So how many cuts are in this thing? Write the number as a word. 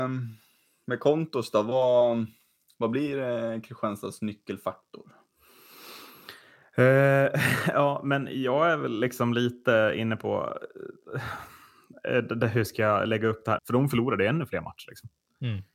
one